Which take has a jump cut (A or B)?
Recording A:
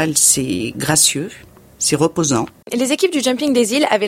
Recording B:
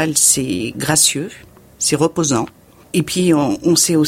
A